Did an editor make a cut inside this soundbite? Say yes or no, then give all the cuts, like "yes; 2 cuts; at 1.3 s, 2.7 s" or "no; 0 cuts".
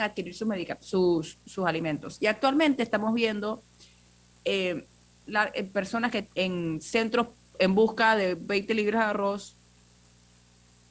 yes; 2 cuts; at 5.2 s, 6.3 s